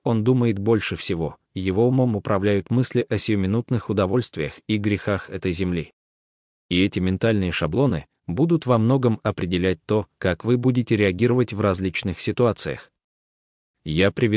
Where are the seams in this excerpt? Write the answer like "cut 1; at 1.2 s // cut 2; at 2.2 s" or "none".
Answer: none